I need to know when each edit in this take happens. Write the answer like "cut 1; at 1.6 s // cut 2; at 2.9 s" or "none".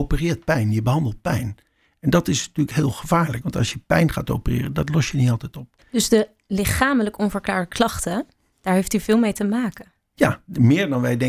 cut 1; at 8.5 s